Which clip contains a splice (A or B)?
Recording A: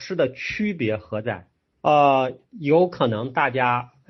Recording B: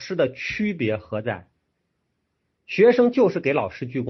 A